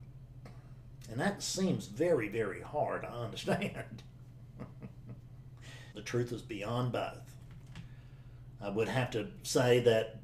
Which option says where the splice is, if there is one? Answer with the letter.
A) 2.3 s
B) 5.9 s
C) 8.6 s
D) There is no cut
B